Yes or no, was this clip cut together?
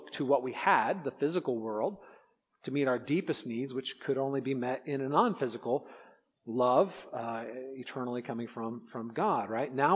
no